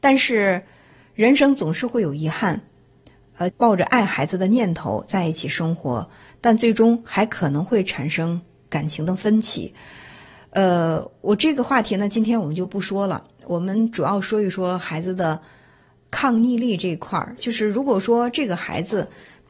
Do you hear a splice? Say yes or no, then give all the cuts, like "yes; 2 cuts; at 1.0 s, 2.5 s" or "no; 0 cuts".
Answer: yes; 1 cut; at 3.5 s